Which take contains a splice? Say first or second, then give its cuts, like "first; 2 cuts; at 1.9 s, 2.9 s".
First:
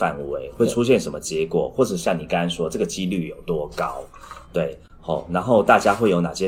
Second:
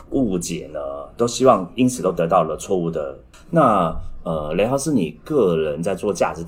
second; 1 cut; at 3.3 s